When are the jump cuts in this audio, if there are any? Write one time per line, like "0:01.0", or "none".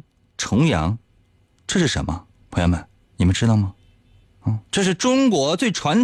none